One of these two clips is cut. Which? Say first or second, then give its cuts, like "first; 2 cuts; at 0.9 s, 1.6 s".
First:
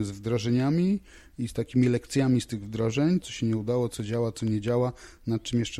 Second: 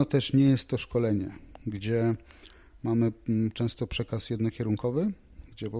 first; 1 cut; at 3.2 s